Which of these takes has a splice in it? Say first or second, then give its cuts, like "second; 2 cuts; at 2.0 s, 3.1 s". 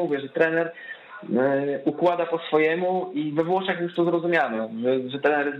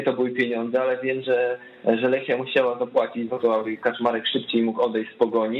second; 1 cut; at 3.3 s